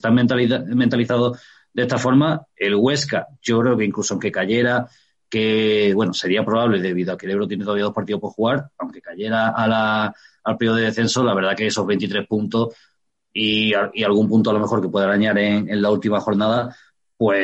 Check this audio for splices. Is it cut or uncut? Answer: uncut